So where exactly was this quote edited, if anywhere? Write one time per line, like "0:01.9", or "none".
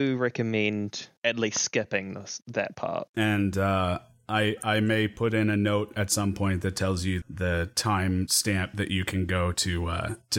0:03.1
0:07.2